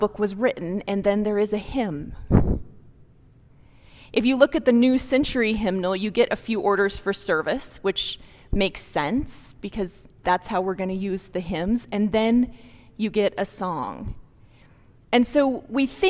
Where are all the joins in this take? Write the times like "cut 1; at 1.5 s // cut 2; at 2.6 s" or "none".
none